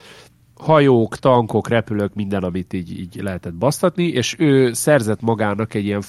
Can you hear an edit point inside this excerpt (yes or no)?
no